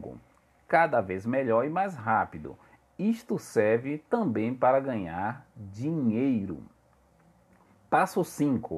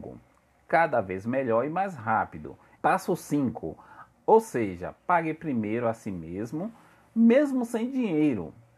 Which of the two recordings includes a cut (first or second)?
second